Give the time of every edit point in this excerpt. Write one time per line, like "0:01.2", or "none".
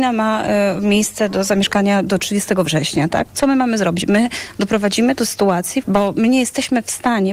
0:03.2
0:05.8